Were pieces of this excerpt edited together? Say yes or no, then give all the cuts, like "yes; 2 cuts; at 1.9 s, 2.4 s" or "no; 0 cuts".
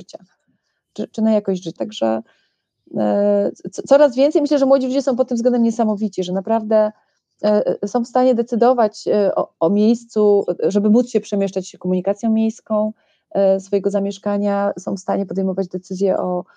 yes; 1 cut; at 1.8 s